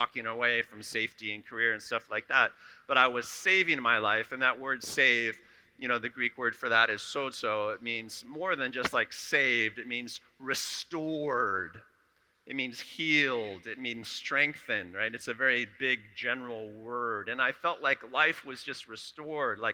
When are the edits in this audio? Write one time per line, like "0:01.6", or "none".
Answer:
none